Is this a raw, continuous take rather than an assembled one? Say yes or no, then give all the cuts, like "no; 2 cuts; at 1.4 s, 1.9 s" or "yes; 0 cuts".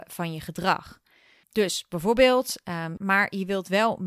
no; 1 cut; at 3.0 s